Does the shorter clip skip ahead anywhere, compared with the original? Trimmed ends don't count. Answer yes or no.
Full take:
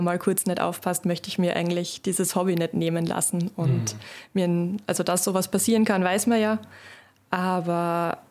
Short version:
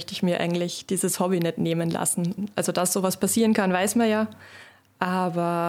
yes